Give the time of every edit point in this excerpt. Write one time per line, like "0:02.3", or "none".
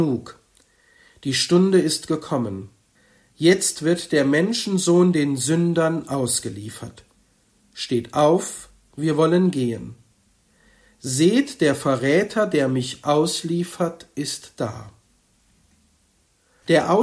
none